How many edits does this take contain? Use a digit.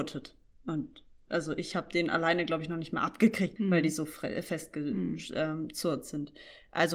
1